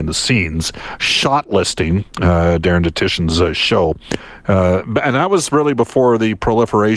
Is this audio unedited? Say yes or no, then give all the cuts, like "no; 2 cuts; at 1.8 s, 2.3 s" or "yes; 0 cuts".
yes; 0 cuts